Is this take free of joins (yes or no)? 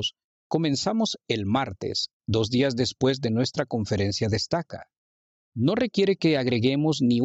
no